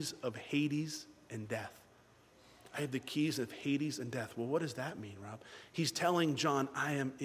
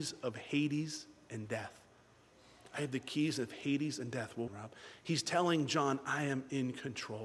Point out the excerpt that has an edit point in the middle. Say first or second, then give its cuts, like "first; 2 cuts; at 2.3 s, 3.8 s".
second; 1 cut; at 4.5 s